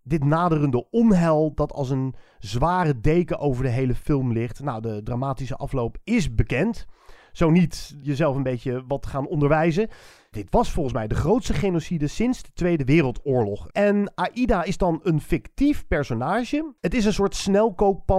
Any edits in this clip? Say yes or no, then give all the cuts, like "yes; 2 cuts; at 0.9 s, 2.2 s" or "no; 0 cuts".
yes; 3 cuts; at 8.0 s, 13.7 s, 16.8 s